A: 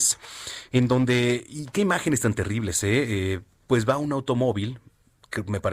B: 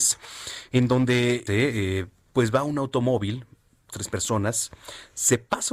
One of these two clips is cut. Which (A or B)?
B